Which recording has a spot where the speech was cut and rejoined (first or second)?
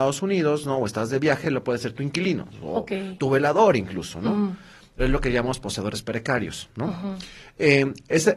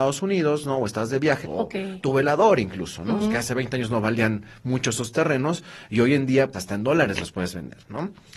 second